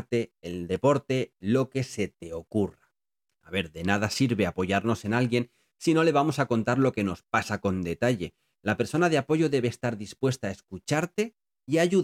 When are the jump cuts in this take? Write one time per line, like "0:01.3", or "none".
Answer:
0:03.3